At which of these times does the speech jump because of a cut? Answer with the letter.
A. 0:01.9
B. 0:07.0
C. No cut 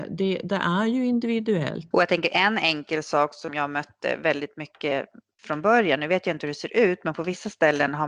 A